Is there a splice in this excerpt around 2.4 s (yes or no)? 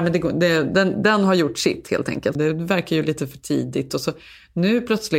yes